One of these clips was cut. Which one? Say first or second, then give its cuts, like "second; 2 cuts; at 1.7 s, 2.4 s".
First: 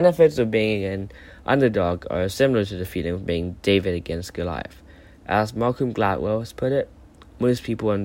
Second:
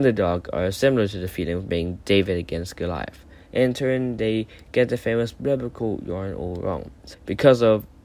second; 2 cuts; at 3.4 s, 7.1 s